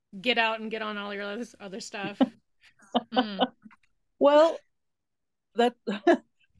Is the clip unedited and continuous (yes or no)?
yes